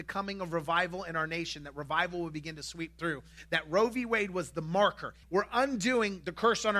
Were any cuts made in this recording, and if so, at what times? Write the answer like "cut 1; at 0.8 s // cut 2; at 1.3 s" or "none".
cut 1; at 5.2 s